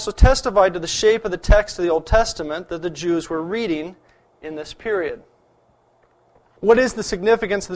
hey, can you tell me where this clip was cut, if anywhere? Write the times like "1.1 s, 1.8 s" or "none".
6.4 s